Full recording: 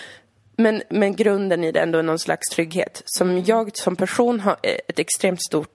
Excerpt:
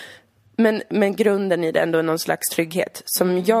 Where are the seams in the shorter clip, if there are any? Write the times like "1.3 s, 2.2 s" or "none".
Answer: none